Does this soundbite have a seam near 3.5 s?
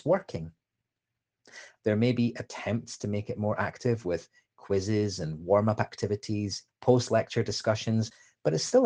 no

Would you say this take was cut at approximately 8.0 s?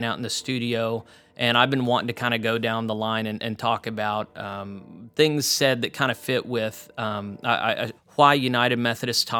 yes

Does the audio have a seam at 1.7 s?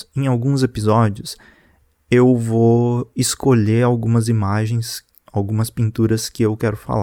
no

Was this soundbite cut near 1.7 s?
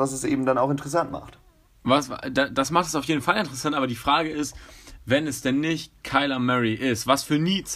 no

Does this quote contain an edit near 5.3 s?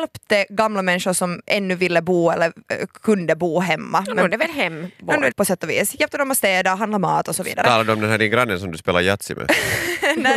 yes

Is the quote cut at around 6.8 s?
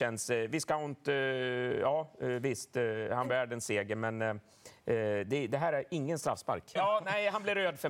yes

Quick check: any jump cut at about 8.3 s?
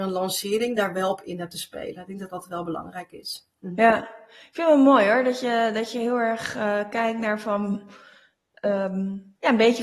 no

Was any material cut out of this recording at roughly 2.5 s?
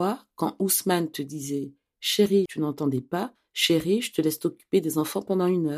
yes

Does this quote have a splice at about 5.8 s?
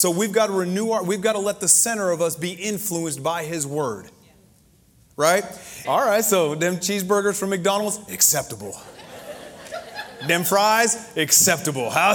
yes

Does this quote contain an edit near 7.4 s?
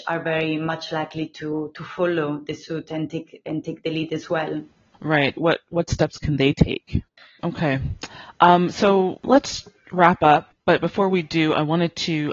yes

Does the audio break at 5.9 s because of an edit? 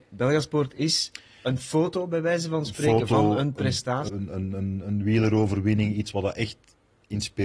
no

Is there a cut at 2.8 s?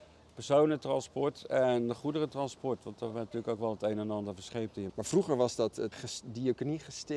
no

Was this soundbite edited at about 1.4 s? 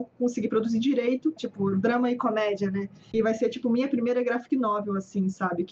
yes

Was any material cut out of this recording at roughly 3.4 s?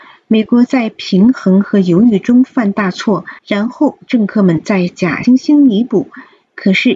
yes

